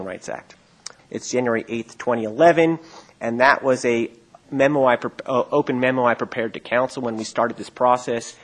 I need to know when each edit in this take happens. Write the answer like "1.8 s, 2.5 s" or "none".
1.0 s